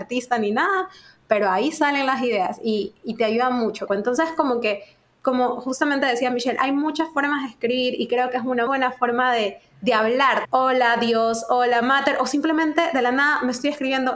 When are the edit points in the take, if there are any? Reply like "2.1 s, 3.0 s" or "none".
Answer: 3.9 s, 8.7 s, 10.4 s